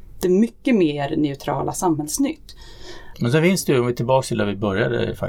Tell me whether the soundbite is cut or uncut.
cut